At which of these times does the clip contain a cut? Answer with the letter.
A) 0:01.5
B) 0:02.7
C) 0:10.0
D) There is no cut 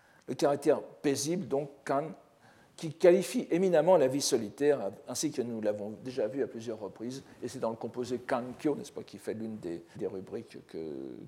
C